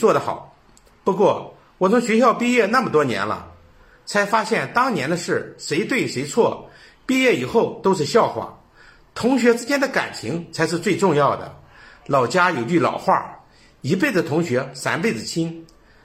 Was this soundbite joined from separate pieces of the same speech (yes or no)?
no